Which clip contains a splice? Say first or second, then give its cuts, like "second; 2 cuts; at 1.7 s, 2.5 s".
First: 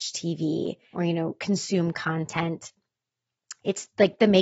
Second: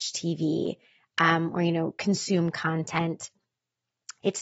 first; 1 cut; at 0.9 s